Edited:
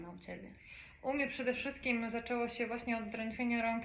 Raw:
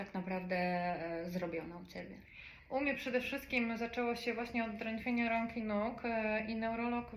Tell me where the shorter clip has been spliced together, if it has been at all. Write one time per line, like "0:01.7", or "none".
none